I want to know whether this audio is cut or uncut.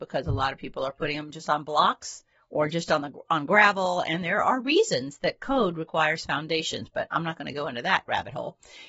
uncut